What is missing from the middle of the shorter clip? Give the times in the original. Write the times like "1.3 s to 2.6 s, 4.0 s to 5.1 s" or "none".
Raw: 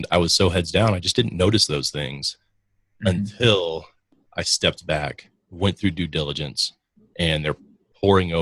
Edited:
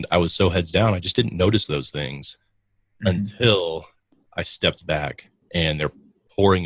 5.4 s to 7.1 s